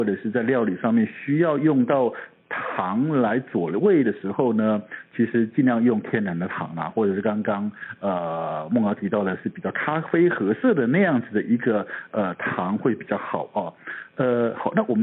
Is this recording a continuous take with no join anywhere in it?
yes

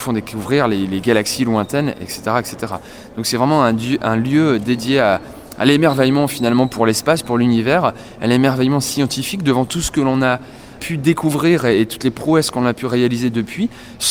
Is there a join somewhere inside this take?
no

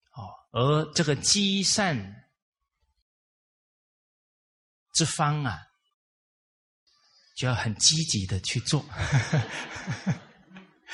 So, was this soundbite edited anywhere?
no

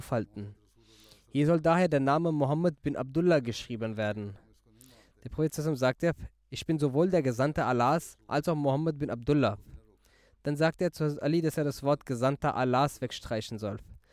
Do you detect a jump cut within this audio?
no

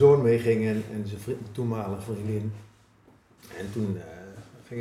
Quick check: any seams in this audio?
no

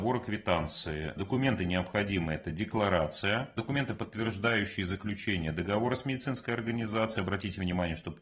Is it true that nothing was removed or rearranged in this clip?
yes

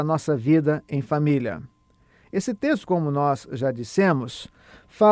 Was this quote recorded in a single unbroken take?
yes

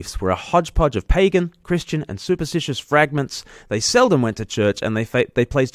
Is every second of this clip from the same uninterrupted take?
yes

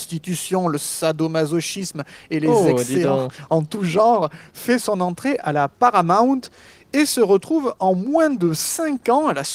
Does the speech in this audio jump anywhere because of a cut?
no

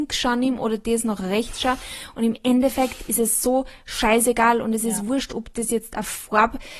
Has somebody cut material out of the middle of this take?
no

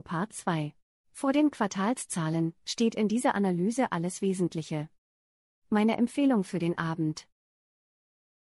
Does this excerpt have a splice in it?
yes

